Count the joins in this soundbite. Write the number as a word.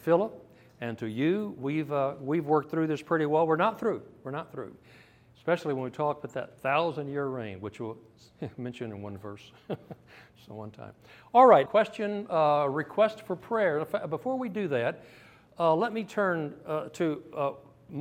one